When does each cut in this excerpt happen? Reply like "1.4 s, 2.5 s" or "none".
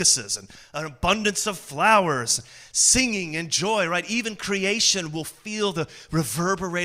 none